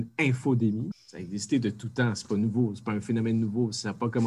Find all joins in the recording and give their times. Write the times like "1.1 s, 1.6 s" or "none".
0.9 s